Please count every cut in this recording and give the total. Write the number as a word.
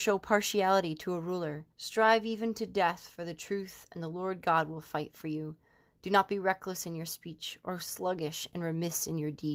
one